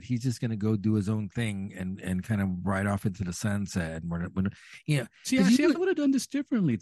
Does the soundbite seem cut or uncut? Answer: uncut